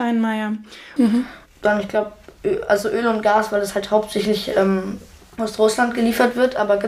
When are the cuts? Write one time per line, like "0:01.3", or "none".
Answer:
0:01.0